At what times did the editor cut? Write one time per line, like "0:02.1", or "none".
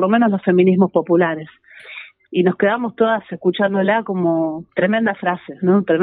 0:02.3
0:04.7